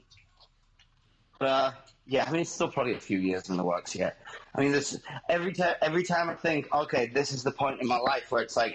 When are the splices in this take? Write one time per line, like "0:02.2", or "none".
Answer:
none